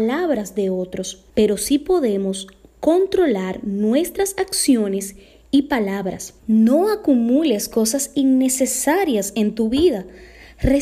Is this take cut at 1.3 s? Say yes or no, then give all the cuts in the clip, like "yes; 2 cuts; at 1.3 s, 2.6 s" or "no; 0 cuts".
yes; 2 cuts; at 1.3 s, 6.4 s